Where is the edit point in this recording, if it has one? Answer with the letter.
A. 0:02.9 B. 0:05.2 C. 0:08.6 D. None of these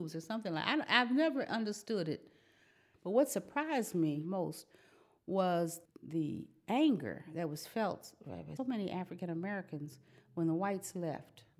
C